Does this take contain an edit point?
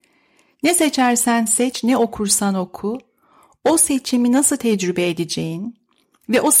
no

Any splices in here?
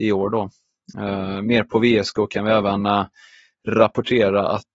no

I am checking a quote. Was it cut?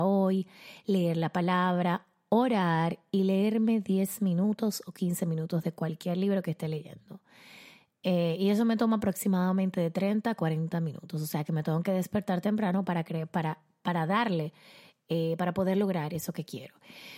no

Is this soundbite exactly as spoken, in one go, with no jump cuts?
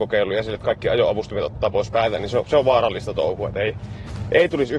yes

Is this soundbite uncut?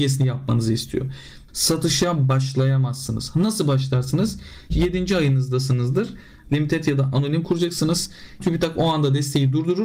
no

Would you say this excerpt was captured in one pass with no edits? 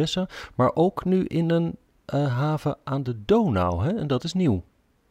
yes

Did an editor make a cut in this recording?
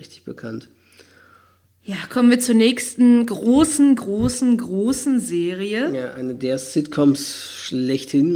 no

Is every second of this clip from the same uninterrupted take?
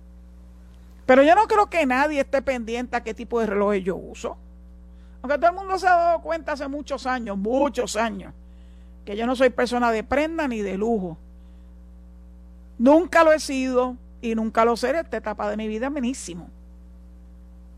yes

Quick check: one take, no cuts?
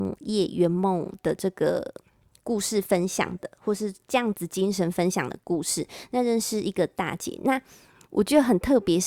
yes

